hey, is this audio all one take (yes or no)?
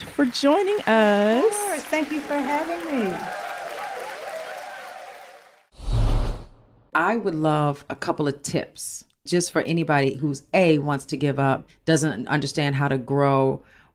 no